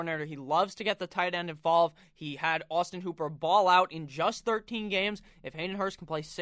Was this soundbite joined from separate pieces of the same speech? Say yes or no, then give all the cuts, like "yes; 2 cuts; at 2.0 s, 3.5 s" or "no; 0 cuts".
no; 0 cuts